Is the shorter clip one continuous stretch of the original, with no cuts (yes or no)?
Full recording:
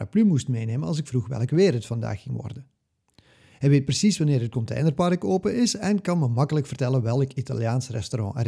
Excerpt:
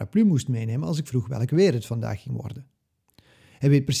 yes